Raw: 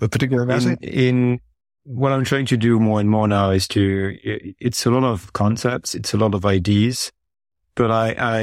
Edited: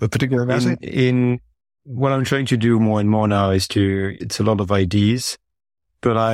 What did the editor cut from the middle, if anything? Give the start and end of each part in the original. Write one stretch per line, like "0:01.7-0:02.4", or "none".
0:04.2-0:05.9